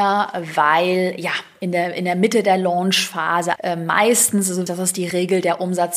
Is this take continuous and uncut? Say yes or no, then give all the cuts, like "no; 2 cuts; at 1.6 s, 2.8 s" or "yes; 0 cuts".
no; 2 cuts; at 3.6 s, 4.7 s